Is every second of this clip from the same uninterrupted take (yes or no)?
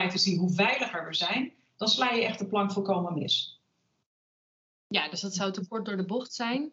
yes